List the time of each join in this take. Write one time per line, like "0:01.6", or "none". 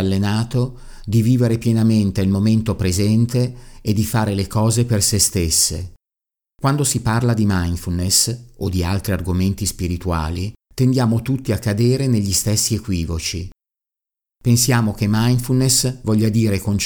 0:06.5
0:10.6

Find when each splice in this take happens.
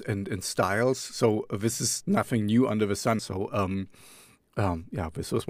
0:03.2

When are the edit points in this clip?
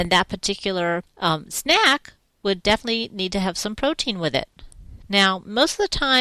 0:01.1

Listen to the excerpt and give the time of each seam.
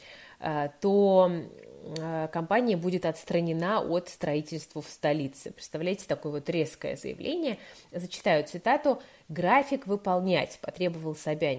none

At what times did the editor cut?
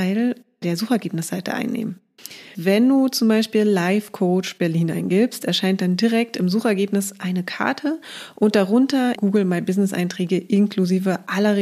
0:02.5
0:09.2

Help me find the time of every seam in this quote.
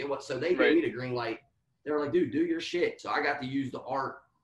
none

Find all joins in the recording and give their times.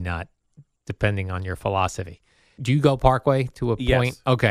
0:02.6

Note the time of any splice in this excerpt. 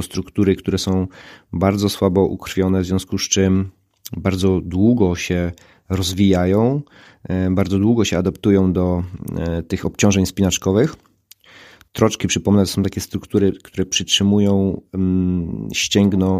none

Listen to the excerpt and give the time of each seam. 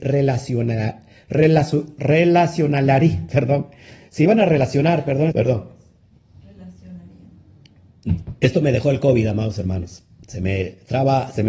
0:05.3

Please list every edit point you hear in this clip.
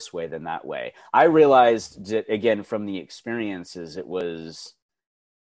none

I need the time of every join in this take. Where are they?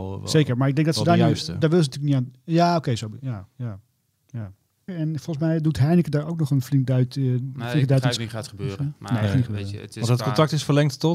0:04.9
0:08.2

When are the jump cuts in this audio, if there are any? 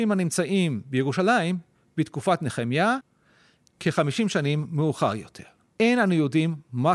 none

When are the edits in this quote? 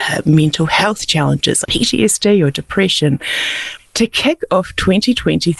0:01.7
0:03.8

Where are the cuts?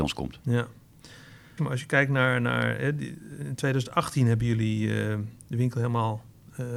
0:01.6

